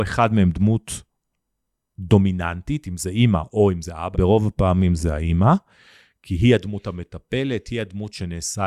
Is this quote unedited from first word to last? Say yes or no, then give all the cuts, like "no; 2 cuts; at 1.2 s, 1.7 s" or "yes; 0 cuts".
no; 1 cut; at 4.1 s